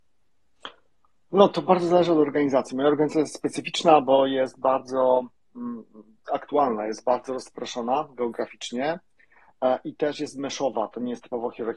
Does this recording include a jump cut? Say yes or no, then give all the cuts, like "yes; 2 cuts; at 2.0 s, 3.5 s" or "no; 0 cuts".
no; 0 cuts